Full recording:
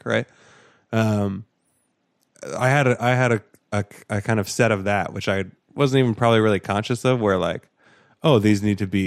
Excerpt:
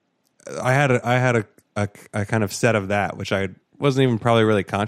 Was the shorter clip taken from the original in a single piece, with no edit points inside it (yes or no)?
yes